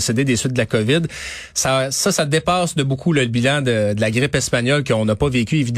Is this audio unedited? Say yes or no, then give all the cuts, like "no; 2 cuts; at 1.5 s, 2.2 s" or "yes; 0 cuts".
yes; 0 cuts